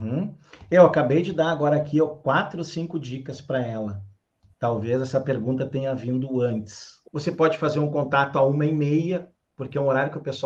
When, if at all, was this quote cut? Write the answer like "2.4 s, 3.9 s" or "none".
7.0 s